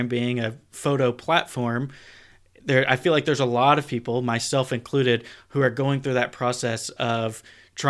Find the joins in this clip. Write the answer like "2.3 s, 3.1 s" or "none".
none